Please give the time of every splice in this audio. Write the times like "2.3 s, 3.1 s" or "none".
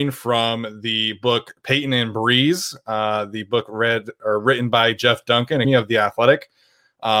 5.6 s